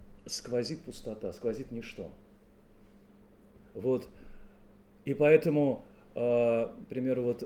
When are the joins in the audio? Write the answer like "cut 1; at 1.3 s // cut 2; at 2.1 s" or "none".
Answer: none